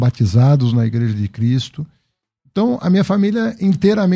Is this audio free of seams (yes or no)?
yes